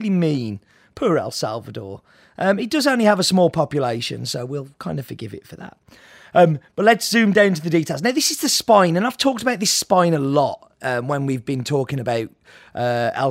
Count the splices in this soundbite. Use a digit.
0